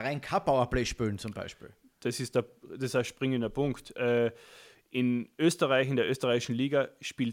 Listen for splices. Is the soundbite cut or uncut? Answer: uncut